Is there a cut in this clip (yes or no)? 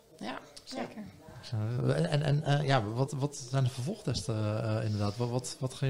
yes